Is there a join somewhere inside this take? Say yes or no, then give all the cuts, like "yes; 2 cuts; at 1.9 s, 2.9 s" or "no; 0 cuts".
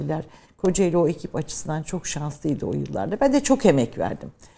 no; 0 cuts